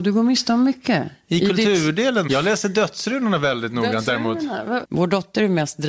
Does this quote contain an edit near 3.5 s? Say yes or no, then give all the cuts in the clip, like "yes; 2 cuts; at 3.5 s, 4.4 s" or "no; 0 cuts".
no; 2 cuts; at 2.3 s, 4.8 s